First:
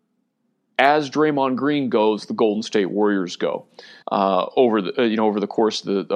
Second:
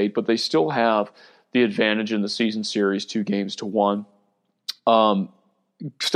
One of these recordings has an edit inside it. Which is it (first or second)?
first